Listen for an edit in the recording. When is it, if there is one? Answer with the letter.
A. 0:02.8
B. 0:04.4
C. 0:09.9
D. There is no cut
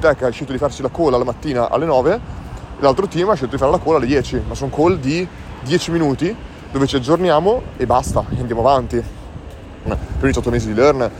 C